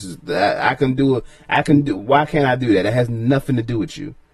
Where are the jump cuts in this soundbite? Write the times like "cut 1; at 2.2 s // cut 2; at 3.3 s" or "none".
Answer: none